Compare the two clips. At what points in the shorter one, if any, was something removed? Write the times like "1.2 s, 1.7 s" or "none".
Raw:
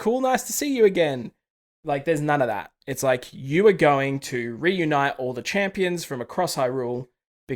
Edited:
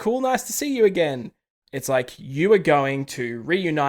1.6 s